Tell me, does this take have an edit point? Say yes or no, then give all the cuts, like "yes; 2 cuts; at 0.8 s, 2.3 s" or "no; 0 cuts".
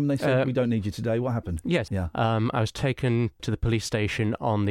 yes; 2 cuts; at 1.9 s, 3.4 s